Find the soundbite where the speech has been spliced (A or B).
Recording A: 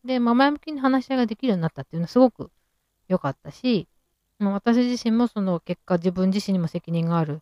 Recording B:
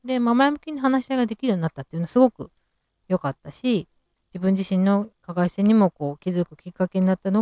B